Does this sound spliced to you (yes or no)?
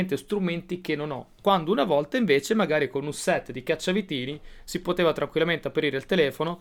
no